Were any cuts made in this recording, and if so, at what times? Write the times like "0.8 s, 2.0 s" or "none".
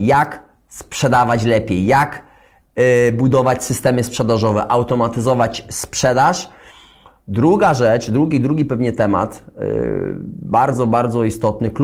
none